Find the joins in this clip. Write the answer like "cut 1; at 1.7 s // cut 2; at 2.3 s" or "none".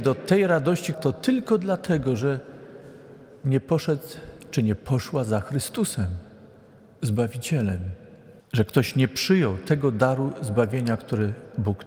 cut 1; at 0.9 s // cut 2; at 8.4 s